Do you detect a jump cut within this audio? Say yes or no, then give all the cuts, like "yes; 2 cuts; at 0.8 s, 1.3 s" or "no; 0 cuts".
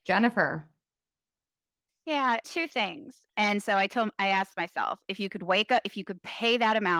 yes; 1 cut; at 3.3 s